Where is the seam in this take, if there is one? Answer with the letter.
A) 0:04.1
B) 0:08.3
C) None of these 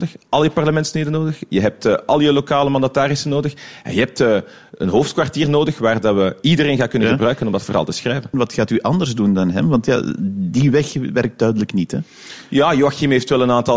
B